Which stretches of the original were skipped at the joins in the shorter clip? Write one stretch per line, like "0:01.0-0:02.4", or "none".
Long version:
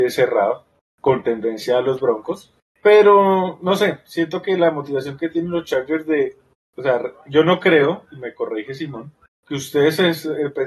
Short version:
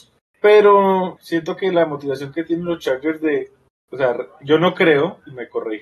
0:03.6-0:04.0